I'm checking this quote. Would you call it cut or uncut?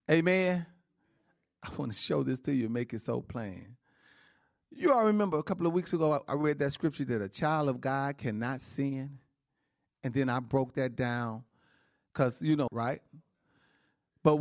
cut